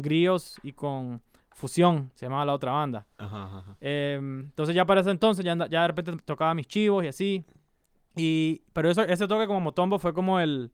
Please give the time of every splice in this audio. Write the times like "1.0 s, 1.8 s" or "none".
none